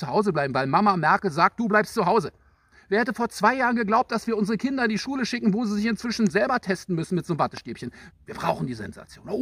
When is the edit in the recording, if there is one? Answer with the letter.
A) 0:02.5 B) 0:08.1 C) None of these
B